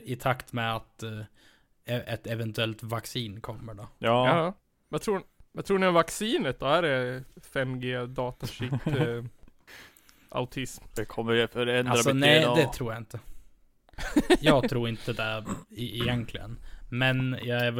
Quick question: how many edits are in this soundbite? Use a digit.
1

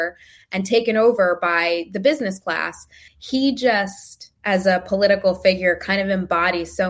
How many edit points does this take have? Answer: 2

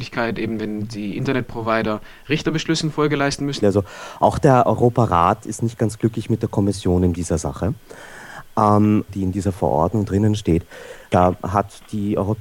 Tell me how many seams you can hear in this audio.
3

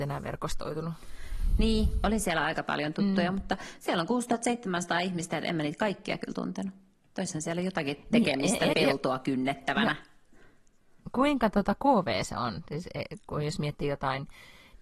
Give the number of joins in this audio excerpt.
1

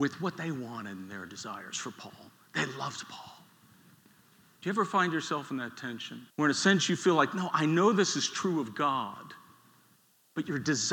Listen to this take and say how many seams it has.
1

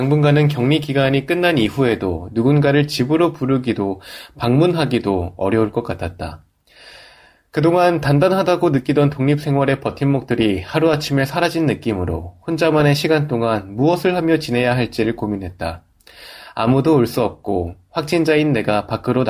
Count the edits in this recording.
0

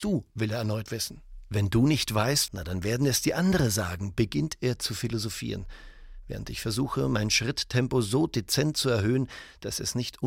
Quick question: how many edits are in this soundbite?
1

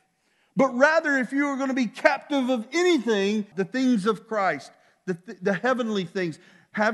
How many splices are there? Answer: 1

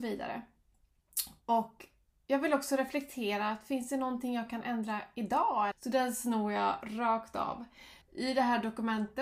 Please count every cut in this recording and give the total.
2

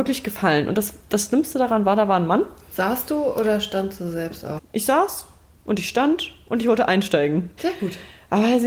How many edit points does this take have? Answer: 2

